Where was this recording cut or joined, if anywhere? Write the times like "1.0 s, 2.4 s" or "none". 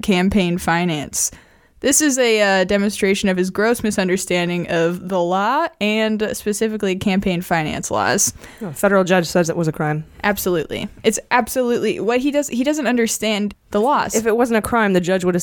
13.5 s

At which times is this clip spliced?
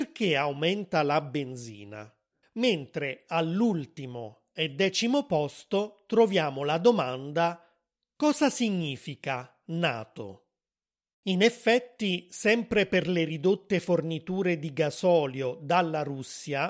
2.4 s, 11.1 s

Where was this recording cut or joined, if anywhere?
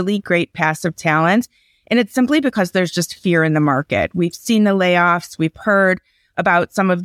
none

